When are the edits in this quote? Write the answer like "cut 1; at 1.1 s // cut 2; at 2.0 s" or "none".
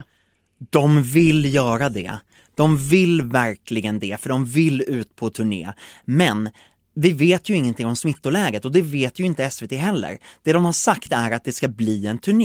none